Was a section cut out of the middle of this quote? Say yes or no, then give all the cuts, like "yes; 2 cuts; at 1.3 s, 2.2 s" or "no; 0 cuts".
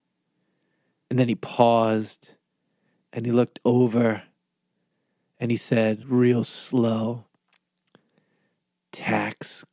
no; 0 cuts